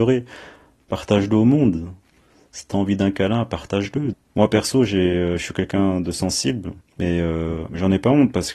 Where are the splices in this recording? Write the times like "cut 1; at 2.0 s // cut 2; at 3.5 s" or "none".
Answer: cut 1; at 4.1 s // cut 2; at 6.8 s